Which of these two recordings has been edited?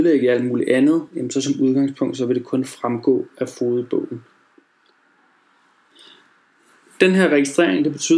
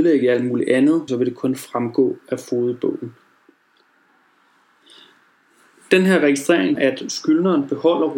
second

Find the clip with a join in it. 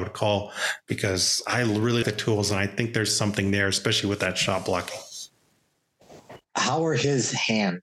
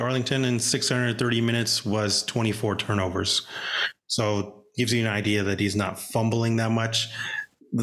first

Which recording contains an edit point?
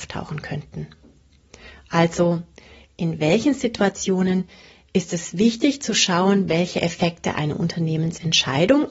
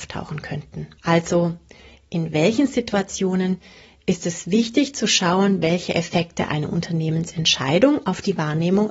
second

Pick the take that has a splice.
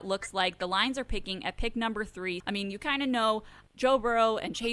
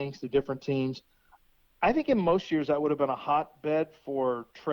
first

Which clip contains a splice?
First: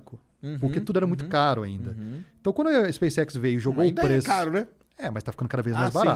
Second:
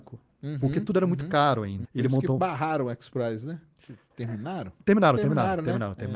second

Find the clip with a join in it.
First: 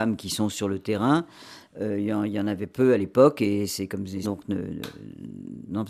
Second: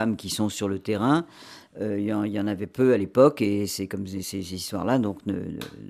first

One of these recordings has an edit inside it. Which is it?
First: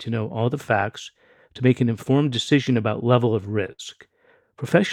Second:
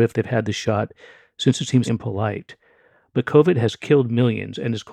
second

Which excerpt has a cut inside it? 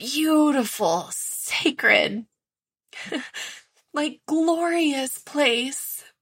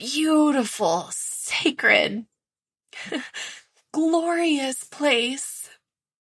second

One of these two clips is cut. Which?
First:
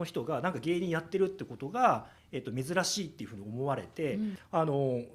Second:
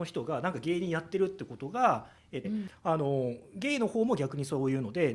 second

